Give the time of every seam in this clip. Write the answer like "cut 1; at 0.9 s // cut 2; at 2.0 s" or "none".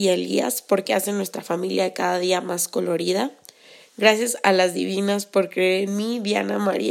none